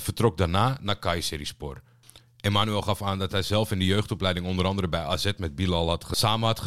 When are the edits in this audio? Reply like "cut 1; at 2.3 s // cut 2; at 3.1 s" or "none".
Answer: none